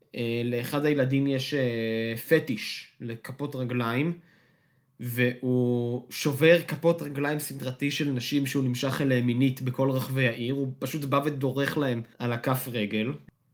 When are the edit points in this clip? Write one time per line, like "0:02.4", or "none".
0:12.1